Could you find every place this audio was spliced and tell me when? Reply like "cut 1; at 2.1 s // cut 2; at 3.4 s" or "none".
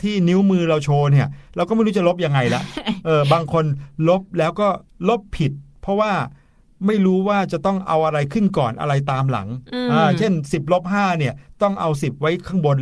none